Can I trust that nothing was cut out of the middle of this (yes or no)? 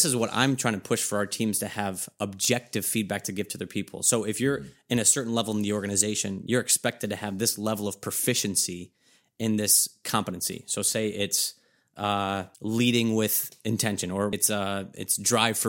no